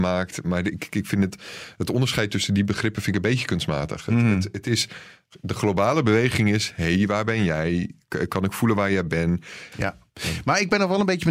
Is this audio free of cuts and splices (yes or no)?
no